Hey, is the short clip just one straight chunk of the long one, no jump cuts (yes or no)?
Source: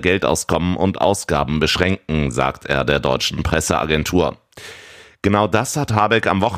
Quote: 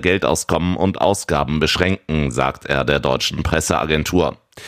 yes